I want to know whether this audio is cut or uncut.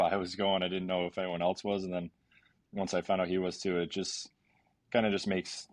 uncut